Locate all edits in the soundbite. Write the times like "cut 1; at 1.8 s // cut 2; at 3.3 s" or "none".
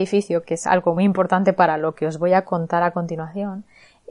cut 1; at 1.0 s